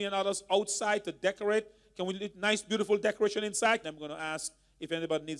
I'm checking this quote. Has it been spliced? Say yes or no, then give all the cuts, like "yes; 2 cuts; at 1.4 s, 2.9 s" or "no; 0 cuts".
yes; 1 cut; at 3.8 s